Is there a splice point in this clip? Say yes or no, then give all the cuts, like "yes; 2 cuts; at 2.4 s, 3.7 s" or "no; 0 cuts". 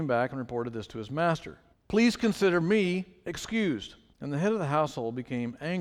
yes; 2 cuts; at 1.7 s, 4.1 s